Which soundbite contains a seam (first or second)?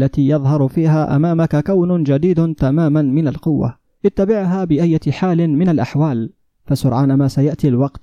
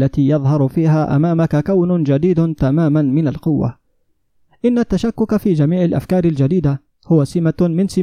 first